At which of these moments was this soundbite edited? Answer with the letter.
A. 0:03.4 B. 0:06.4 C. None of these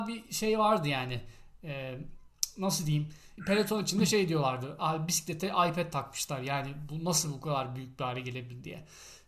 A